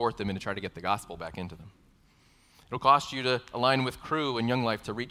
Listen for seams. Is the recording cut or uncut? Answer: uncut